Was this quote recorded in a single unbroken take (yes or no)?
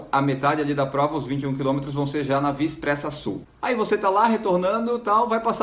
no